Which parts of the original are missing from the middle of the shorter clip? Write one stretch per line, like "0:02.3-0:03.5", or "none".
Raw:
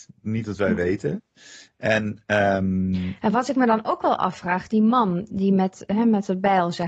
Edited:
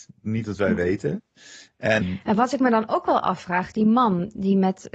0:02.0-0:03.0

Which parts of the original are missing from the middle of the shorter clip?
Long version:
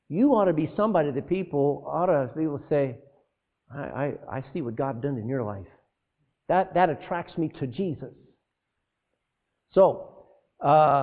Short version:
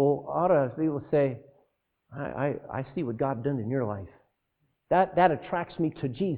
none

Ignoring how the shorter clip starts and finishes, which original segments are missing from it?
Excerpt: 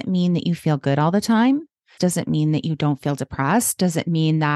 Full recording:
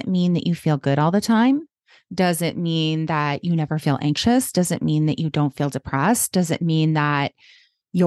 0:02.0-0:04.5

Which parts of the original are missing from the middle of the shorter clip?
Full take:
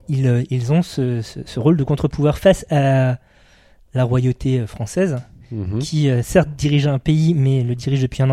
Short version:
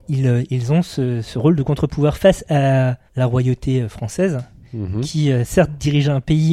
0:01.2-0:01.4
0:03.3-0:03.8

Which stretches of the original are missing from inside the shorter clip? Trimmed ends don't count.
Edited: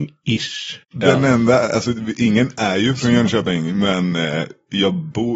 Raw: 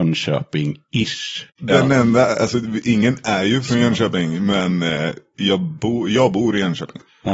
none

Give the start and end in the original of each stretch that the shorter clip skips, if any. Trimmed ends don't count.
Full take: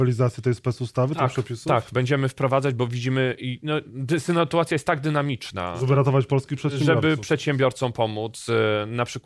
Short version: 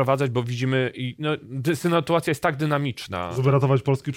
none

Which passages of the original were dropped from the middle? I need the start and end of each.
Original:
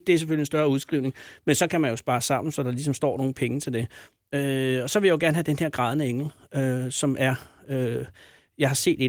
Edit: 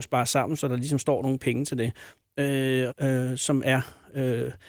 0:04.8-0:06.4

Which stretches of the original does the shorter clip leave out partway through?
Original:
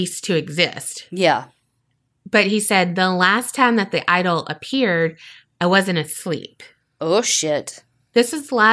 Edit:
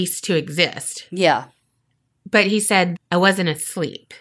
0:02.9-0:05.4

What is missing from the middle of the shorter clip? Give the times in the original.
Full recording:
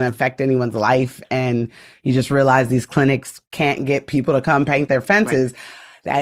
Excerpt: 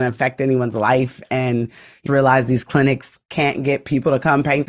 0:02.1-0:02.3

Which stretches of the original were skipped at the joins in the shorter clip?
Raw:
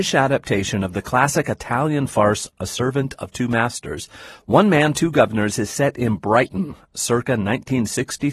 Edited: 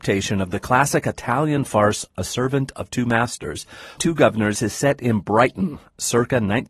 0:04.4-0:04.9

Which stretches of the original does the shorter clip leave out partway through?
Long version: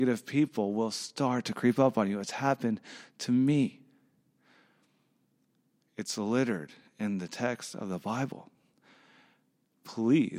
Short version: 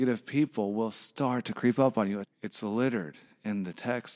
0:02.2-0:05.8

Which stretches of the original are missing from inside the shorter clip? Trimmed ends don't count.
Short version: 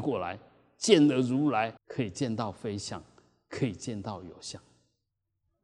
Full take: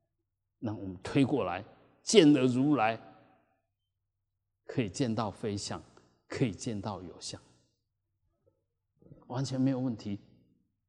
0:03.0-0:04.6

